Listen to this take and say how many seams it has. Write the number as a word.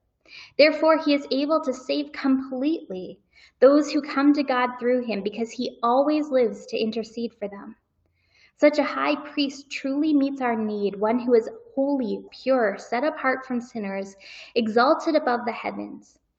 one